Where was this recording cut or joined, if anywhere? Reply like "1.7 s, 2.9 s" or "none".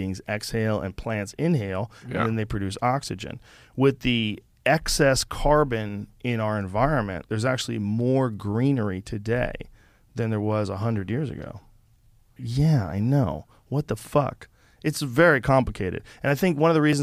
12.4 s